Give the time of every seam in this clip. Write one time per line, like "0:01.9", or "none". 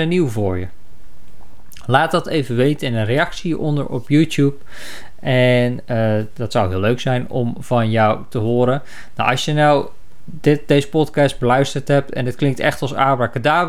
none